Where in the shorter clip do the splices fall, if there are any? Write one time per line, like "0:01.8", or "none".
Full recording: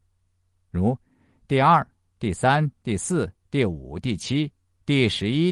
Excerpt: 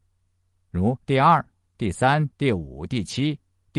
0:01.0
0:02.3